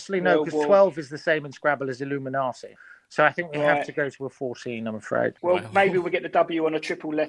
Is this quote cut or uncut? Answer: uncut